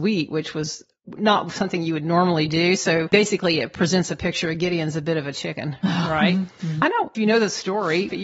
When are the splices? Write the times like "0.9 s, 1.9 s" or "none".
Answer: 6.8 s